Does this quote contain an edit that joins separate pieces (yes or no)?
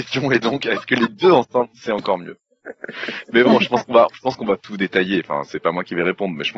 no